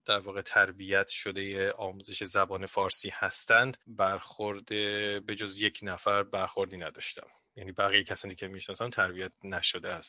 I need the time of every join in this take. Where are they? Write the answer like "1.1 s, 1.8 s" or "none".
3.8 s